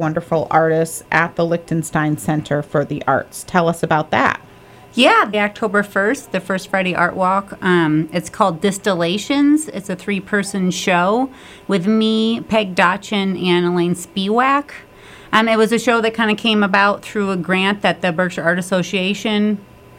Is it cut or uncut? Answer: cut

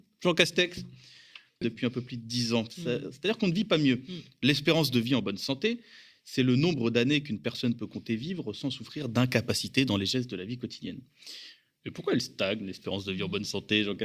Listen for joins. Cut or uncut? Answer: cut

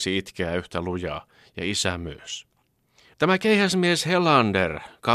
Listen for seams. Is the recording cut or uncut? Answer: cut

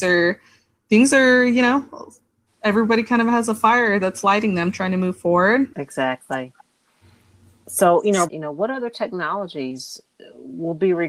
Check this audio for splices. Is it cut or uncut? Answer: cut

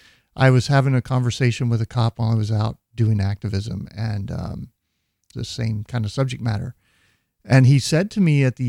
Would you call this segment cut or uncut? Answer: cut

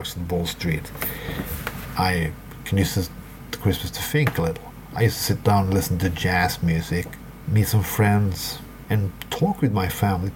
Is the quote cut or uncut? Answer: cut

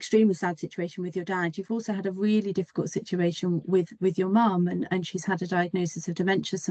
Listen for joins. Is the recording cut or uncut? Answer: uncut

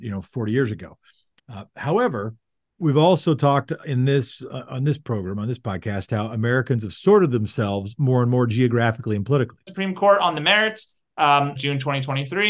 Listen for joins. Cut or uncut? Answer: cut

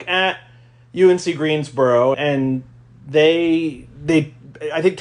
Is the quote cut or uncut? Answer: cut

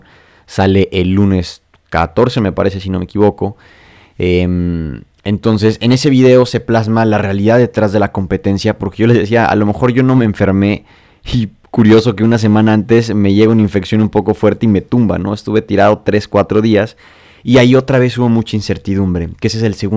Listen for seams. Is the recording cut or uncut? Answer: uncut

